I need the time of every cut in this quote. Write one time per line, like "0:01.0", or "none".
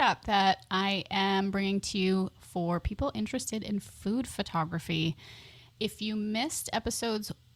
none

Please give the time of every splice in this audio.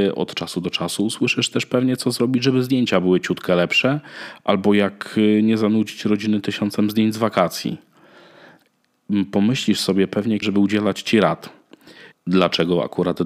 0:10.4
0:12.1

